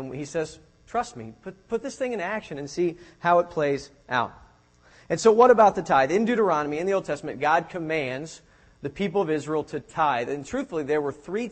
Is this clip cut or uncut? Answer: uncut